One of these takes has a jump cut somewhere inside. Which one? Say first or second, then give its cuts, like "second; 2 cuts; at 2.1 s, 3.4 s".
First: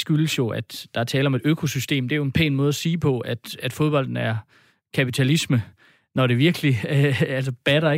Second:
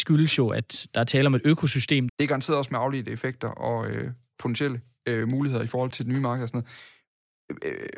second; 2 cuts; at 2.1 s, 5.9 s